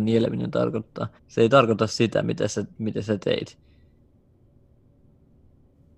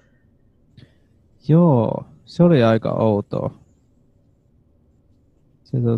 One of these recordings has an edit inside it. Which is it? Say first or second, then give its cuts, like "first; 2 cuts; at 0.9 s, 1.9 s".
first; 2 cuts; at 1.2 s, 2.7 s